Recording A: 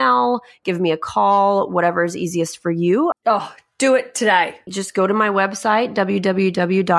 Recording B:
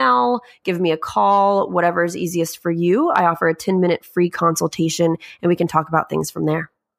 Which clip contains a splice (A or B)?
A